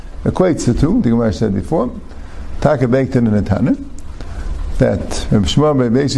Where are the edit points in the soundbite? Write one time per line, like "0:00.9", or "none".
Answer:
0:01.0
0:02.6